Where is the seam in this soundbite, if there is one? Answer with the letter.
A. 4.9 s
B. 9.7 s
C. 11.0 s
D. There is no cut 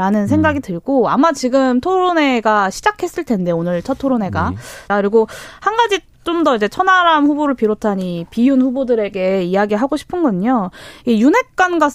A